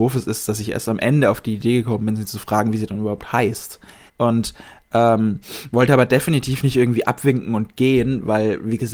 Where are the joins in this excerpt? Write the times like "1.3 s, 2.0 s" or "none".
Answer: 4.1 s